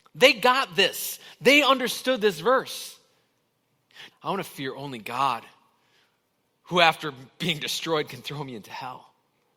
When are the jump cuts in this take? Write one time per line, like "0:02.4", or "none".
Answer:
0:04.1

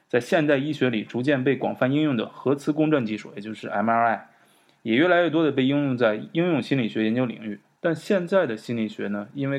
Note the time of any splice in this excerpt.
0:07.7

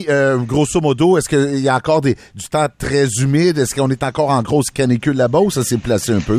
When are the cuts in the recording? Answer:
none

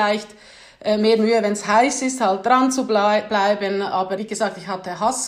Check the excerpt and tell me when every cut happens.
0:04.2

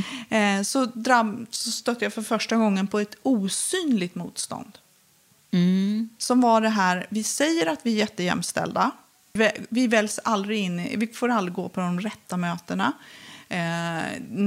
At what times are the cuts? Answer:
0:09.4

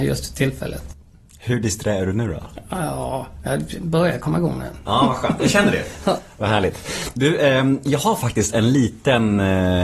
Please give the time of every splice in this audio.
none

